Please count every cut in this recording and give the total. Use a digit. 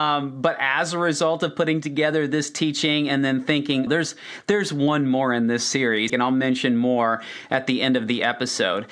2